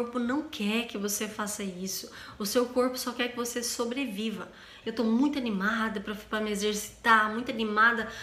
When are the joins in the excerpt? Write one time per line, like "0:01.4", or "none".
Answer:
0:04.8